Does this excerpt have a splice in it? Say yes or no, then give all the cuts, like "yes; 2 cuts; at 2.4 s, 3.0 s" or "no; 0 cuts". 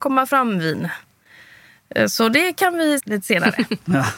yes; 1 cut; at 3.0 s